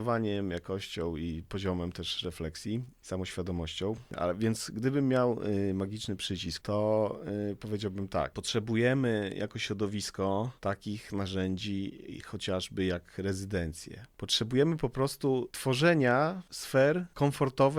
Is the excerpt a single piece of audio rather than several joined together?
no; 2 cuts; at 4.1 s, 6.6 s

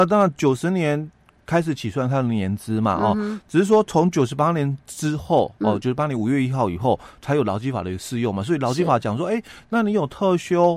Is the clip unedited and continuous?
yes; 0 cuts

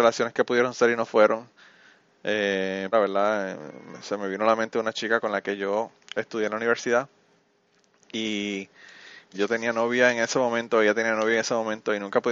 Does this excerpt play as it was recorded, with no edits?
no; 2 cuts; at 2.9 s, 9.3 s

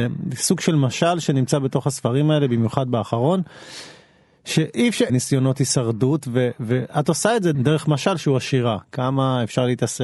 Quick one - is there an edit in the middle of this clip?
yes; 2 cuts; at 5.1 s, 7.5 s

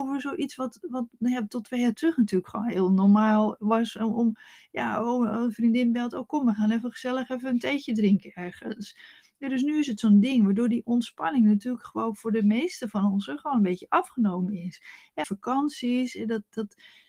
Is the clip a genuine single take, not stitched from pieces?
no; 1 cut; at 15.2 s

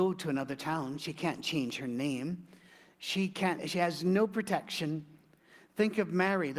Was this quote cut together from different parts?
yes; 1 cut; at 3.6 s

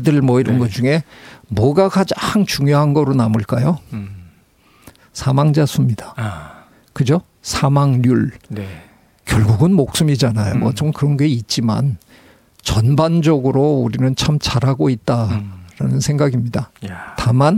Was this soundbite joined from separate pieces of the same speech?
yes; 1 cut; at 10.5 s

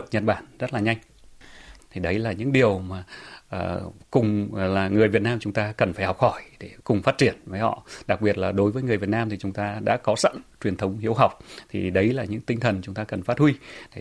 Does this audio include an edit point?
yes; 2 cuts; at 1.8 s, 6.8 s

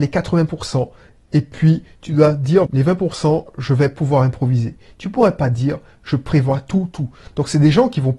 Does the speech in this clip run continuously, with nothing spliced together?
no; 1 cut; at 2.7 s

